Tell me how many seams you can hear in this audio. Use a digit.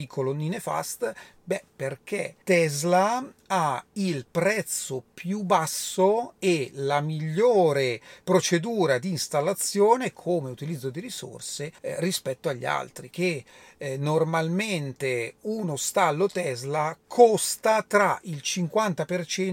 3